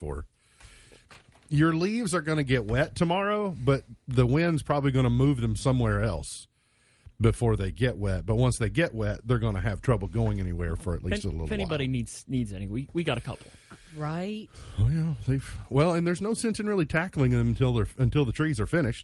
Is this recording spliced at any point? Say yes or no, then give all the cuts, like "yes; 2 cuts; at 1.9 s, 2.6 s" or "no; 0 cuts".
no; 0 cuts